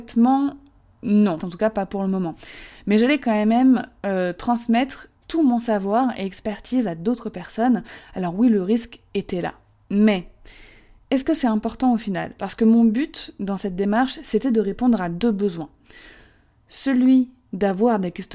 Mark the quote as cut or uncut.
cut